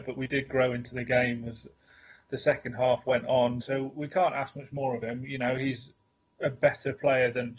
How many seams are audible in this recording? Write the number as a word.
one